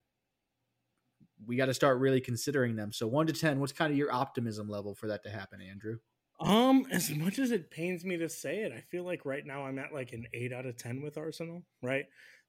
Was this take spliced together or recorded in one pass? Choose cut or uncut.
uncut